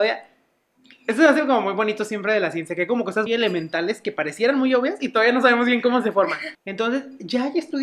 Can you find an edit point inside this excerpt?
yes; 2 cuts; at 3.3 s, 6.5 s

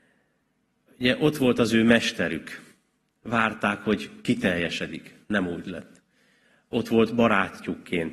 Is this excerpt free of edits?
yes; 0 cuts

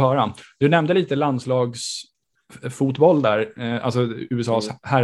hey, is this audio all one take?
yes; 0 cuts

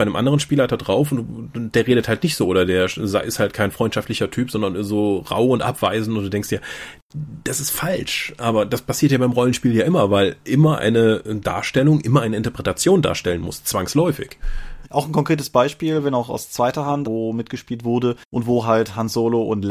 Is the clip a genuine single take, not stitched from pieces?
no; 2 cuts; at 14.8 s, 17.0 s

